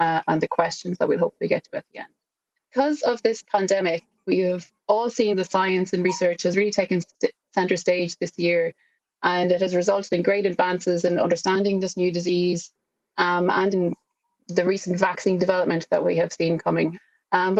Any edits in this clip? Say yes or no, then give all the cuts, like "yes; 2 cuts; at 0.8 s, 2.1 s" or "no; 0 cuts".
no; 0 cuts